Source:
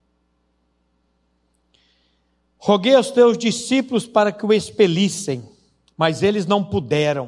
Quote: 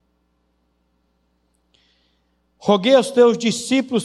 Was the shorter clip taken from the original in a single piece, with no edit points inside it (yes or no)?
yes